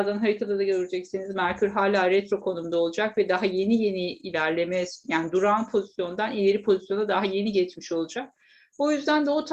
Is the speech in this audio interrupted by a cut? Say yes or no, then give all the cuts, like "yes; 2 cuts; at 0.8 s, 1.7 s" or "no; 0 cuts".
no; 0 cuts